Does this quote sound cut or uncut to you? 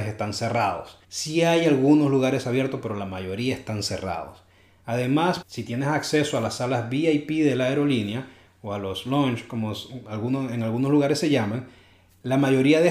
cut